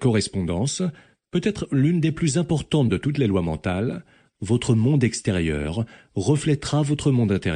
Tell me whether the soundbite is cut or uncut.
uncut